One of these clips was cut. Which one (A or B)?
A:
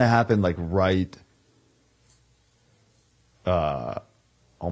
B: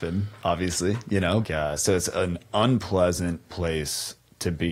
B